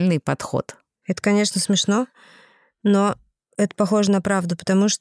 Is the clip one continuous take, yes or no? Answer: no